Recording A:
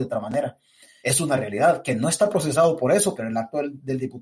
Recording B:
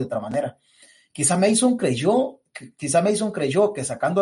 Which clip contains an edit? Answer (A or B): A